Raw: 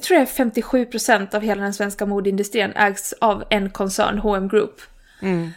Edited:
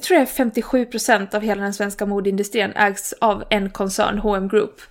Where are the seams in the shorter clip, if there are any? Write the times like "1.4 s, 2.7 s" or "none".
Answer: none